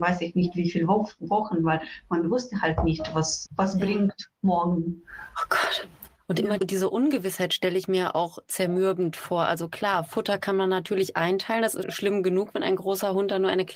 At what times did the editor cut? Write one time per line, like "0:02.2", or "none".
0:03.5
0:06.6
0:11.8